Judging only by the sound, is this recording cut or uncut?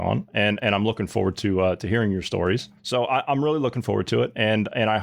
cut